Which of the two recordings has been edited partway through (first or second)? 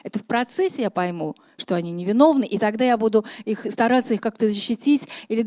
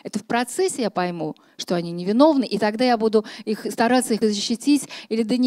second